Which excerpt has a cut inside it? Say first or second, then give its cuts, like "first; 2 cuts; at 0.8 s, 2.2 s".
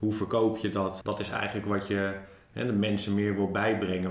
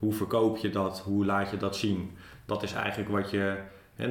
first; 1 cut; at 1.0 s